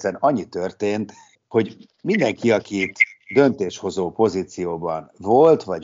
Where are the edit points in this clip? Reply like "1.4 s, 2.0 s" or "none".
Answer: 1.3 s